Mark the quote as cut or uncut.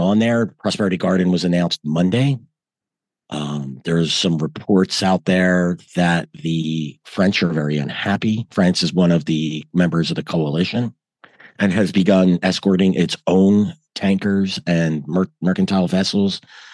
uncut